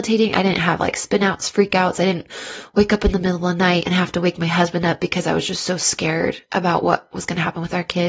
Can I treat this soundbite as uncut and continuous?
yes; 0 cuts

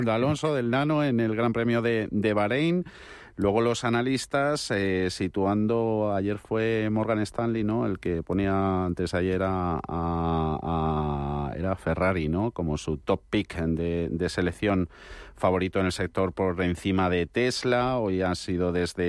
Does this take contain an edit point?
no; 0 cuts

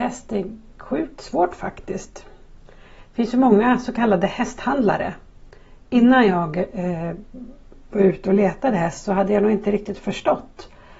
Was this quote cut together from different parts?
no; 0 cuts

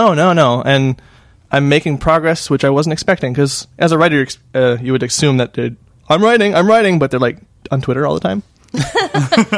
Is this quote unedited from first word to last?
yes; 0 cuts

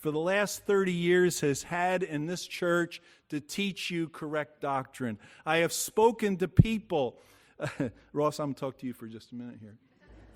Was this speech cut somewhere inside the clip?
no; 0 cuts

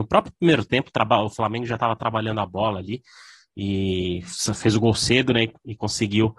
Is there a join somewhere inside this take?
no; 0 cuts

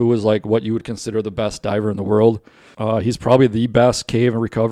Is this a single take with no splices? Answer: no; 1 cut; at 2.7 s

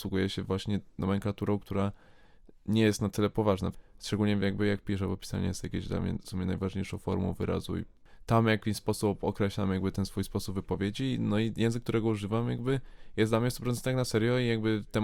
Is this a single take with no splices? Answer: yes; 0 cuts

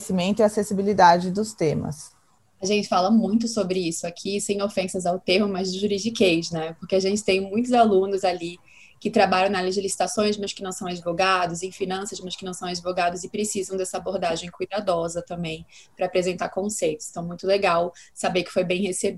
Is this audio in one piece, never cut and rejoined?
yes; 0 cuts

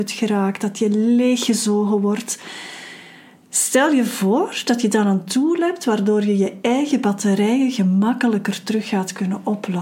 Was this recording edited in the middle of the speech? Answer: no; 0 cuts

